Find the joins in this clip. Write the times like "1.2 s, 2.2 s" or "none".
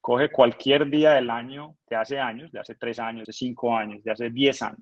1.8 s, 3.2 s